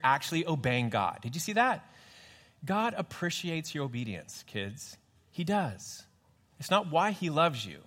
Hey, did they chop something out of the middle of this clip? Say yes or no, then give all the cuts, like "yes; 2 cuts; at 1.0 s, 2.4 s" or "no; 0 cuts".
no; 0 cuts